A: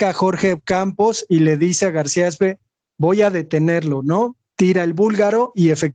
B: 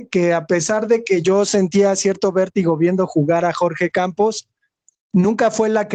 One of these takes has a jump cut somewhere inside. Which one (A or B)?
B